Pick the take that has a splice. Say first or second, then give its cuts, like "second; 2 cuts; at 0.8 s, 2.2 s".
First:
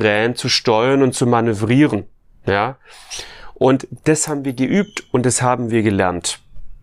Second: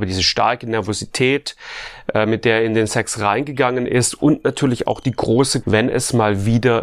second; 1 cut; at 5.6 s